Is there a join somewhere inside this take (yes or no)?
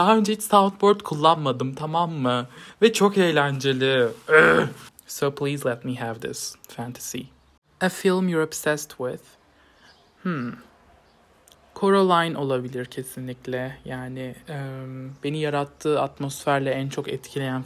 no